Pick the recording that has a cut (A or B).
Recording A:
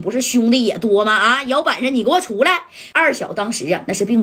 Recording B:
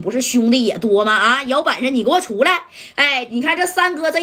A